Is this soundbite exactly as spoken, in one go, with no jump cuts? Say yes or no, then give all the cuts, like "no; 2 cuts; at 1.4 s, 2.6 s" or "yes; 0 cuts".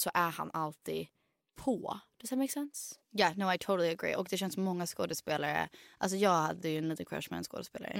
yes; 0 cuts